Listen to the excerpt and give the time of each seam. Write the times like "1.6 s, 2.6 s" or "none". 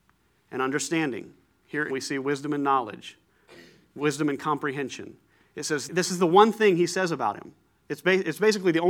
1.9 s, 5.9 s